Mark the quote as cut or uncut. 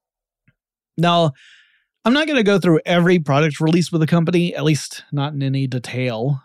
uncut